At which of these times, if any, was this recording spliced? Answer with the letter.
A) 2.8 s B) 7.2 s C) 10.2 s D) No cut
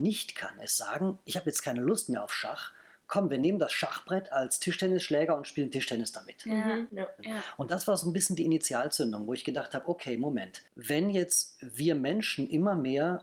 B